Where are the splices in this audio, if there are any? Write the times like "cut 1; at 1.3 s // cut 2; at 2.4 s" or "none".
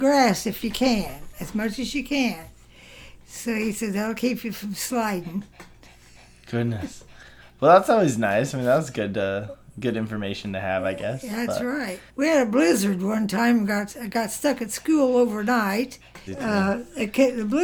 cut 1; at 12.1 s // cut 2; at 16.3 s